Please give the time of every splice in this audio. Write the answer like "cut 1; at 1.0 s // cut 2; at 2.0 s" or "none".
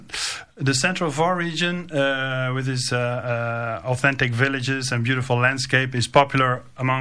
none